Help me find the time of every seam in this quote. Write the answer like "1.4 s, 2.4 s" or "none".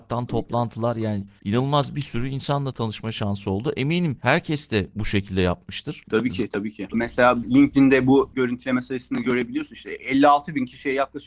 6.9 s